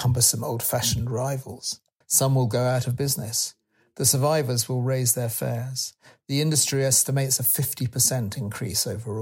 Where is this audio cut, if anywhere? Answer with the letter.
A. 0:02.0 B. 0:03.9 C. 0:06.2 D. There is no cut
A